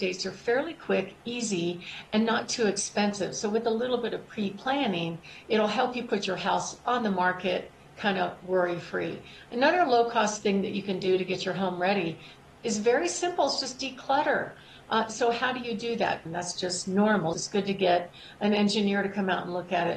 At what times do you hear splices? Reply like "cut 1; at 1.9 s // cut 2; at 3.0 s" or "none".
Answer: cut 1; at 16.3 s // cut 2; at 17.3 s

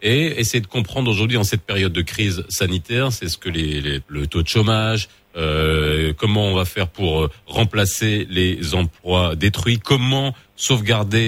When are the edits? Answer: cut 1; at 4.0 s

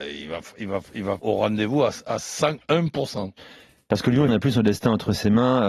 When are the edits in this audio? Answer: cut 1; at 1.2 s // cut 2; at 4.3 s

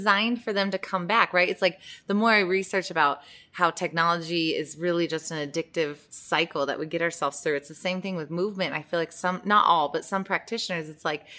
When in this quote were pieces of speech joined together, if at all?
none

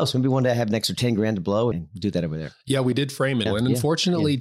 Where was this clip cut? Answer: cut 1; at 1.7 s // cut 2; at 3.5 s

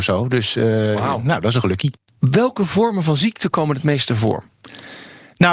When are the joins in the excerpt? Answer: none

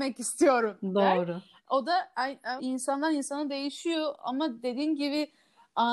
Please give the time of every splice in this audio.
cut 1; at 2.6 s

